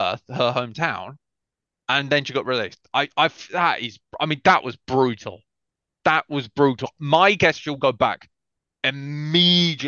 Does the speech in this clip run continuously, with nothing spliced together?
yes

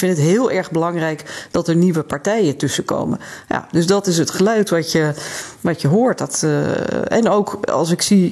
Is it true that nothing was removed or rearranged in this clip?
yes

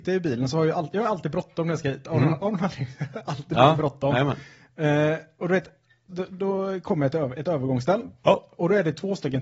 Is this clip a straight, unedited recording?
no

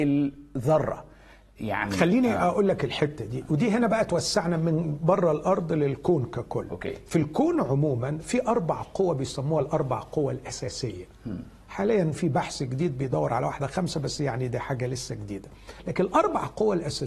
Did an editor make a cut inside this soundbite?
no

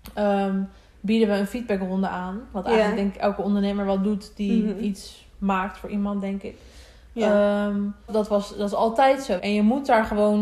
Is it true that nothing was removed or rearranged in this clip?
no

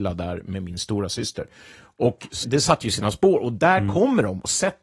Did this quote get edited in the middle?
yes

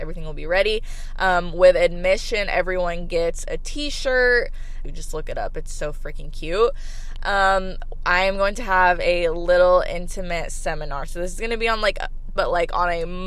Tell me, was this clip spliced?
yes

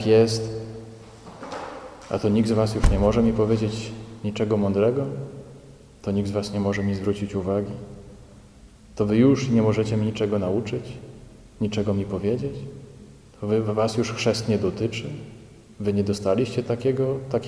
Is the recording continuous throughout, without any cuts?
yes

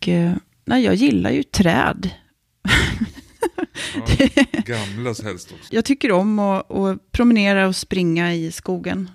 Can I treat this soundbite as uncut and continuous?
no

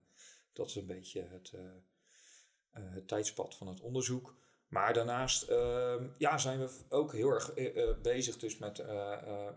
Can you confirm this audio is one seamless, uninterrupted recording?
yes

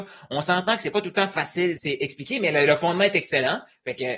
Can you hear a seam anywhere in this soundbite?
yes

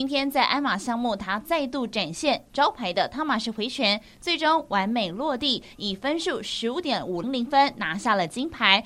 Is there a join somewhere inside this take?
yes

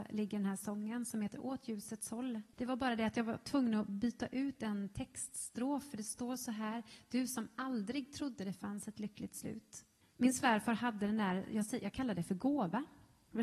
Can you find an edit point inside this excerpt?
yes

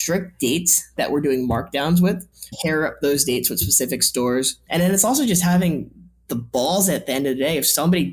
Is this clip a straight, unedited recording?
no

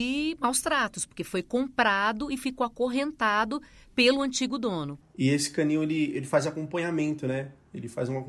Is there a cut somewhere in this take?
yes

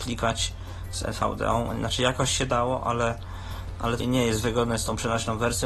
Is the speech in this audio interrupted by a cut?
yes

